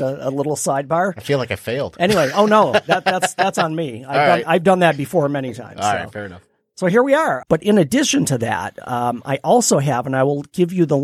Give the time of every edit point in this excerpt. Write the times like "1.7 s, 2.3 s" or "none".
7.4 s